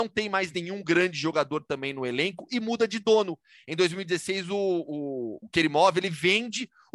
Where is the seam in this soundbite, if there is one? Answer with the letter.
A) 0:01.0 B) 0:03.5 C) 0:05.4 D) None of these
C